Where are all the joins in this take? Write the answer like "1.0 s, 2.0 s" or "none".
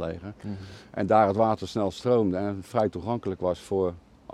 none